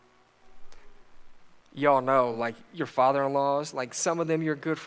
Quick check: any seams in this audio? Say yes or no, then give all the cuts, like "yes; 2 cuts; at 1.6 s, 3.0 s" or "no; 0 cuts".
no; 0 cuts